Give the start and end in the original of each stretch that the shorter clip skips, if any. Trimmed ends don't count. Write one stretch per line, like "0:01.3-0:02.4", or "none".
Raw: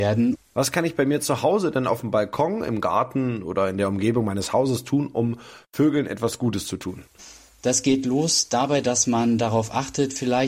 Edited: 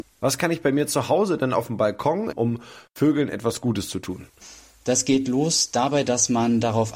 0:02.7-0:05.1